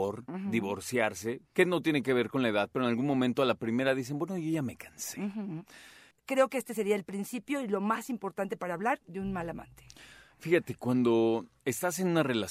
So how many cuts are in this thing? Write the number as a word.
one